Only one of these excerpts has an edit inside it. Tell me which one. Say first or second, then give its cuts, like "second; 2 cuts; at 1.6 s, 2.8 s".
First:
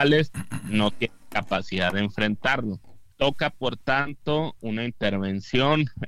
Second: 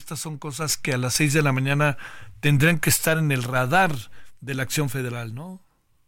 first; 2 cuts; at 3.1 s, 4.6 s